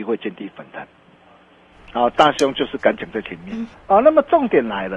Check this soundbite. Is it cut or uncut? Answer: cut